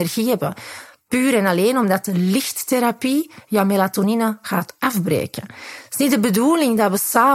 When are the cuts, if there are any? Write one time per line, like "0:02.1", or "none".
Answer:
none

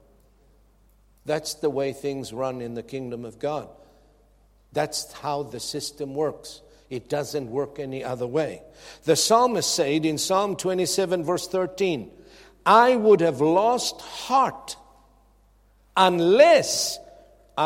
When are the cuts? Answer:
none

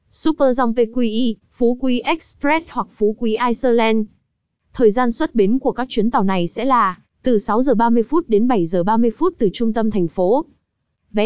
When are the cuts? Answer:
none

